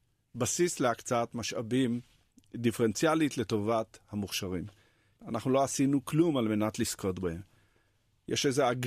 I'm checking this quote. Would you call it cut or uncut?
cut